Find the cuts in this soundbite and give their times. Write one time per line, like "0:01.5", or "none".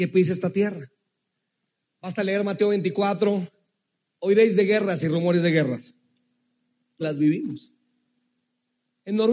0:01.8
0:07.0